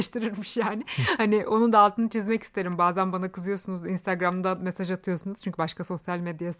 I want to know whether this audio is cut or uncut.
uncut